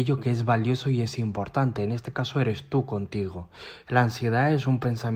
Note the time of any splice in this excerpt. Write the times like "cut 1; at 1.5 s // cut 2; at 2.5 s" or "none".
cut 1; at 3.8 s